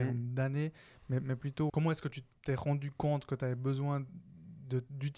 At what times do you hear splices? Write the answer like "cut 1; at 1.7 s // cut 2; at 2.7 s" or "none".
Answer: cut 1; at 1.7 s